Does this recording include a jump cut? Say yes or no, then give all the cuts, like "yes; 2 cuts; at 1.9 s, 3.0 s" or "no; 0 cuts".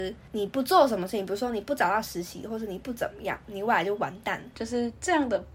yes; 1 cut; at 4.5 s